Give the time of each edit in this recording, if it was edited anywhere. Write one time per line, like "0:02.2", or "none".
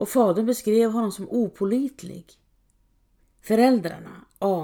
0:03.2